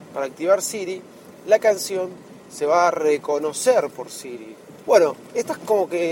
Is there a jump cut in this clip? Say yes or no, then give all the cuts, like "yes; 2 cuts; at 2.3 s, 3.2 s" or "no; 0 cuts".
yes; 1 cut; at 4.8 s